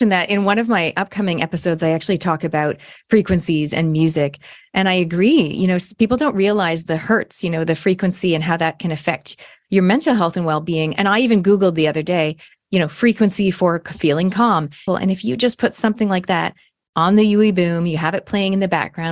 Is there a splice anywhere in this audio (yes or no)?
yes